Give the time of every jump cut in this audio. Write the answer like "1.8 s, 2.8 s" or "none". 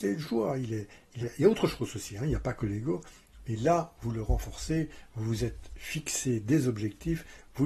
1.2 s